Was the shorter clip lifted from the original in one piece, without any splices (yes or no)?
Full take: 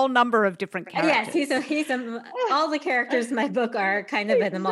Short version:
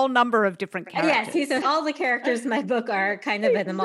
no